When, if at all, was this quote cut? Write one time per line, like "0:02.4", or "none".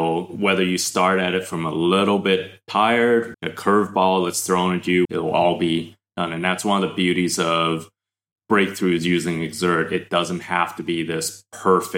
0:03.3
0:05.0